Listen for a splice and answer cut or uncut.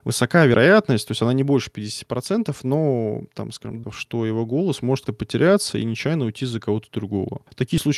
cut